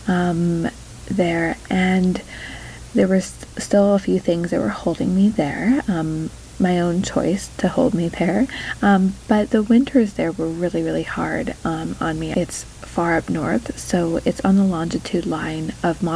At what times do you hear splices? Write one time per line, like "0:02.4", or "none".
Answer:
0:12.3